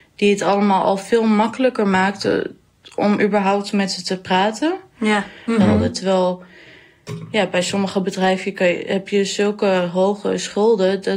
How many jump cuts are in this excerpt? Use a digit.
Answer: 1